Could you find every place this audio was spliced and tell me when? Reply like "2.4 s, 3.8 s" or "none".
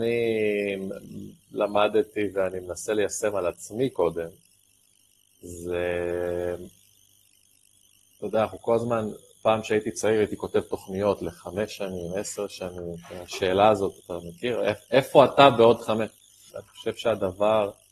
16.5 s